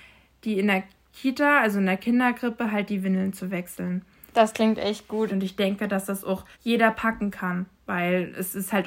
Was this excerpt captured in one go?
no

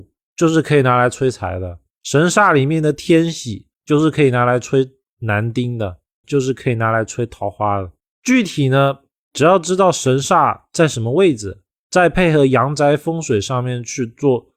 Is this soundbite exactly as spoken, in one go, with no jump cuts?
no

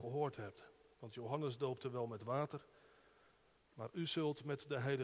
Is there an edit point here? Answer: no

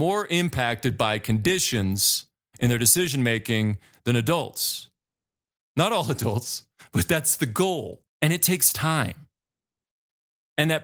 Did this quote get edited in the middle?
yes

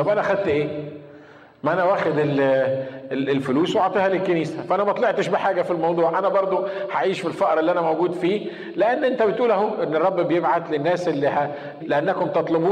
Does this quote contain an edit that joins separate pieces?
yes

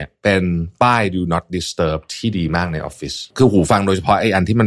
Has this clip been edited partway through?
yes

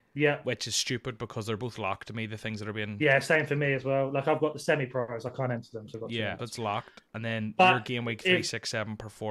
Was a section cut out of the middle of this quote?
yes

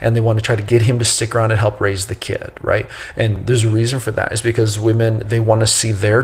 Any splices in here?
no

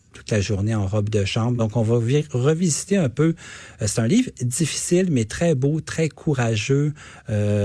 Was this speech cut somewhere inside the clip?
no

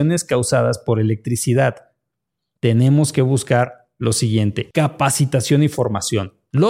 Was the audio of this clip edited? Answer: yes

